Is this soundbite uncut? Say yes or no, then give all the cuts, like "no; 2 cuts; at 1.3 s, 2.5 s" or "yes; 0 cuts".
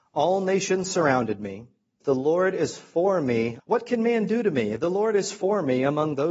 no; 2 cuts; at 2.0 s, 3.6 s